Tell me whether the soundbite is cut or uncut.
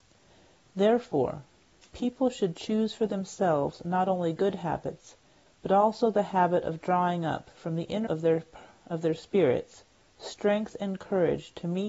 cut